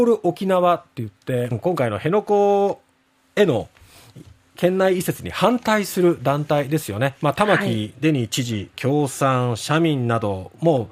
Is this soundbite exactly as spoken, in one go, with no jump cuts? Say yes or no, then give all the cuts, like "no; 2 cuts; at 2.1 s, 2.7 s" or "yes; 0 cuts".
no; 2 cuts; at 1.5 s, 8.7 s